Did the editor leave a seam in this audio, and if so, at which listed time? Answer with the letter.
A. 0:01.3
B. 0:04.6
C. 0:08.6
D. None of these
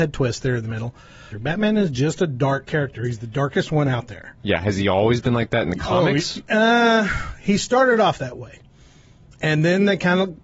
A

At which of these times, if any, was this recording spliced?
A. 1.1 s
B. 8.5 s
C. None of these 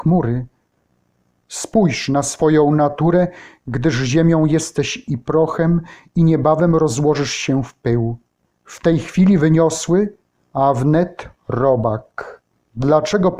C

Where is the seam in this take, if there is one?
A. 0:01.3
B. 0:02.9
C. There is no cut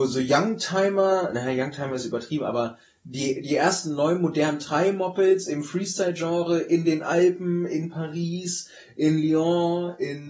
C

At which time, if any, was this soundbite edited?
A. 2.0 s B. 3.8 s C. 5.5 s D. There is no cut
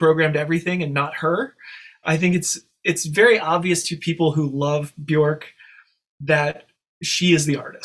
A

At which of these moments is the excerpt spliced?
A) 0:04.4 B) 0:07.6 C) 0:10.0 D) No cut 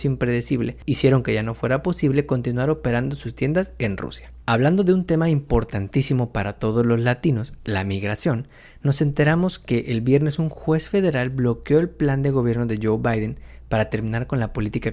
A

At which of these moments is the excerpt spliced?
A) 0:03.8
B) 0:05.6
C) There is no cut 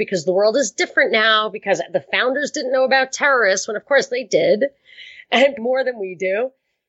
B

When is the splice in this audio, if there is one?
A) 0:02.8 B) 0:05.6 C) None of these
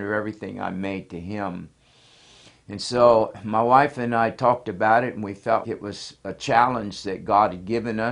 B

